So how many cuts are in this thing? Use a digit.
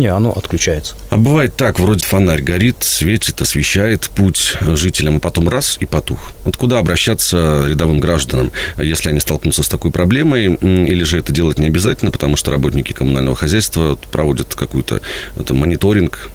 1